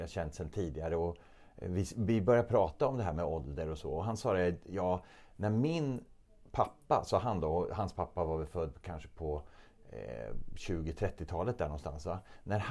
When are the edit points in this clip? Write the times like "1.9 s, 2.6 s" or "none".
none